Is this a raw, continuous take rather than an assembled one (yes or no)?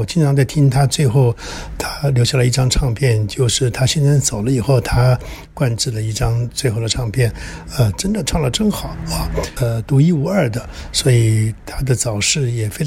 no